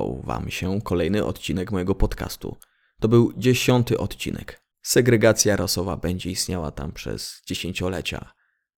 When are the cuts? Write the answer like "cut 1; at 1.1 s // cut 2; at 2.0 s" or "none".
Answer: cut 1; at 4.7 s